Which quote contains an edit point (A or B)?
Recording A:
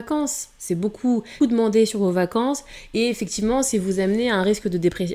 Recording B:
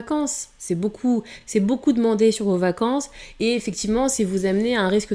A